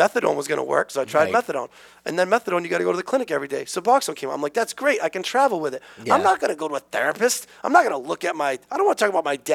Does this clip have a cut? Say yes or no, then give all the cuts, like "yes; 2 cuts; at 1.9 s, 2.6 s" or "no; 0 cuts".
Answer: no; 0 cuts